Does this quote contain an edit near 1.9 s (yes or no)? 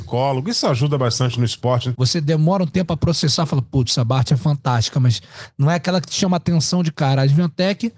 yes